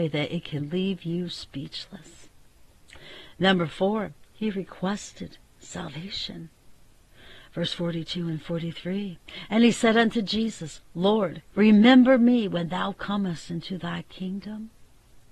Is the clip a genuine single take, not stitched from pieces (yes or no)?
no